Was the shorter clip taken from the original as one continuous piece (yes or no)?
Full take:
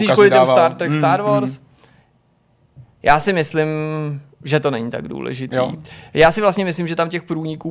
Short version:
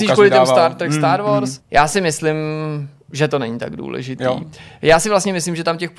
no